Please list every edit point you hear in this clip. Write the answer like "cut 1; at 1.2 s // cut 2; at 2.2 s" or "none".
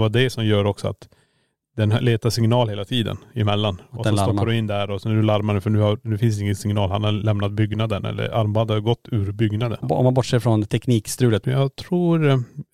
cut 1; at 9.8 s // cut 2; at 11.4 s